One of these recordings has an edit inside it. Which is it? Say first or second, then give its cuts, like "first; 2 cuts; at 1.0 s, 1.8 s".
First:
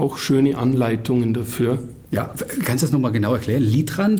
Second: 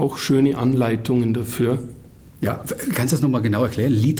first; 1 cut; at 2.1 s